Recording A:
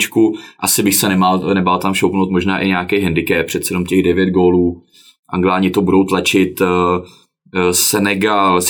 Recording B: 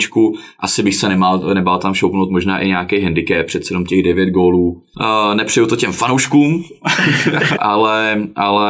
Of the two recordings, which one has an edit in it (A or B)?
B